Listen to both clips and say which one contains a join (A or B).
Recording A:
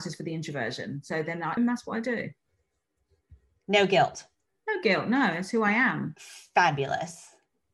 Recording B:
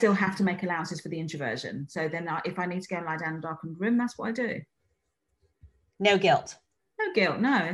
A